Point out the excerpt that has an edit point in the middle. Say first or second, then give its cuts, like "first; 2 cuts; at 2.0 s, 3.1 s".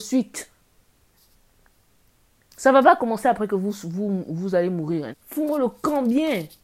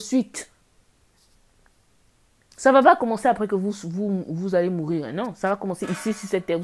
first; 1 cut; at 5.1 s